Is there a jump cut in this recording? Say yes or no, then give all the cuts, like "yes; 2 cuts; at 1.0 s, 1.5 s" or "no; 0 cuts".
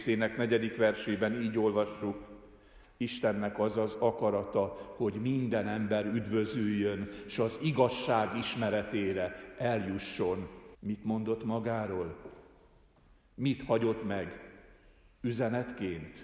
yes; 1 cut; at 10.7 s